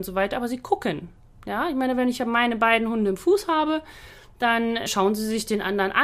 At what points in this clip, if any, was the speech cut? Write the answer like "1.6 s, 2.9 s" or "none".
none